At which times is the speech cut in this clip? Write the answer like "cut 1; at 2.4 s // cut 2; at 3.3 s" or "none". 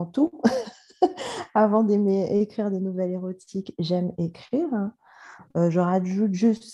none